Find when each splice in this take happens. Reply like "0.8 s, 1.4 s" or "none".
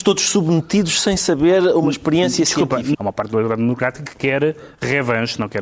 2.9 s